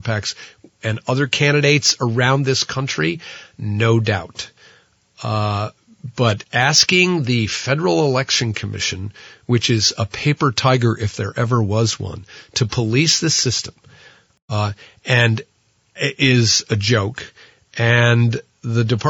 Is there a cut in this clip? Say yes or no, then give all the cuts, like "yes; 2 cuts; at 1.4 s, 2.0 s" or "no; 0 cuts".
yes; 1 cut; at 16.0 s